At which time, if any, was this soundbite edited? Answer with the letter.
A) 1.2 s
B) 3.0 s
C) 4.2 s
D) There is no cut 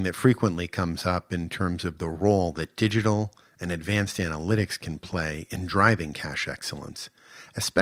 D